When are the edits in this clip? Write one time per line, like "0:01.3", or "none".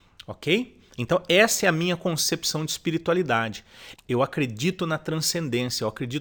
0:04.0